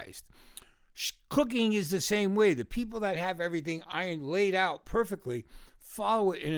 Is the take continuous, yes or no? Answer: yes